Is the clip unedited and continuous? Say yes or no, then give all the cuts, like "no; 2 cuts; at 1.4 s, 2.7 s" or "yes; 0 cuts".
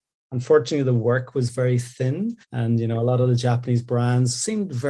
no; 1 cut; at 2.4 s